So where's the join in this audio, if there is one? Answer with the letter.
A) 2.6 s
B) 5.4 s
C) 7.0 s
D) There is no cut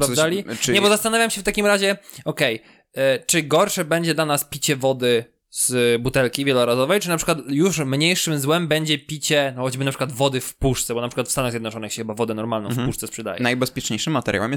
B